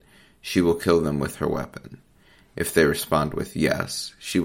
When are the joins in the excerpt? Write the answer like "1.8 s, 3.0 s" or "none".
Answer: none